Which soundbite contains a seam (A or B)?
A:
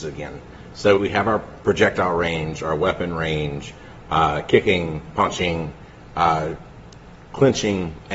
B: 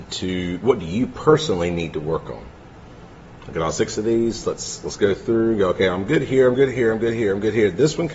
A